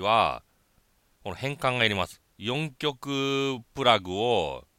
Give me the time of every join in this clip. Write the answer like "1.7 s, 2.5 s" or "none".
2.3 s